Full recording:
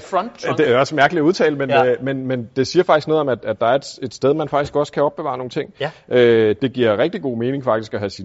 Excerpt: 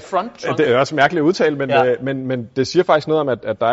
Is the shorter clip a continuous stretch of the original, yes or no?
yes